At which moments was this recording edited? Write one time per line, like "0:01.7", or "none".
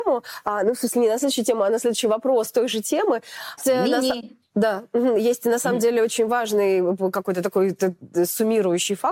0:03.6